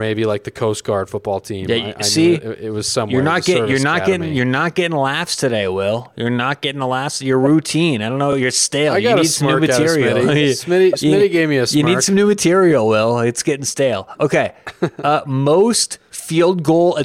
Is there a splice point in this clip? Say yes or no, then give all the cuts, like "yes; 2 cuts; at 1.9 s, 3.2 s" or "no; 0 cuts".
no; 0 cuts